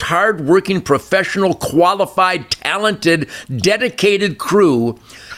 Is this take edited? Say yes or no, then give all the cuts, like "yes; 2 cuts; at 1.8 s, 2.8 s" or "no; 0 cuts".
no; 0 cuts